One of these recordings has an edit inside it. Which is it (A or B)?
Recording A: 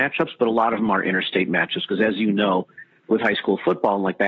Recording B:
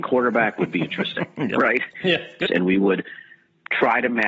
B